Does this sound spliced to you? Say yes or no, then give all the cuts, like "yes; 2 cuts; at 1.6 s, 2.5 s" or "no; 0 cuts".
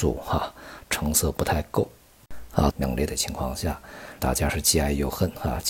yes; 2 cuts; at 2.7 s, 4.2 s